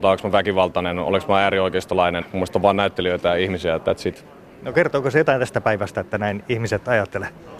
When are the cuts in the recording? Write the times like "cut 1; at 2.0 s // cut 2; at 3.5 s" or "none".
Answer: cut 1; at 2.2 s